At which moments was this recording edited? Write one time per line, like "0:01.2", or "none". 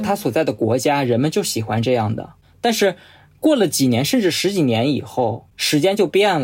none